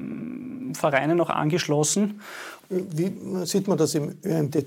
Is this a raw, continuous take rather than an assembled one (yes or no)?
no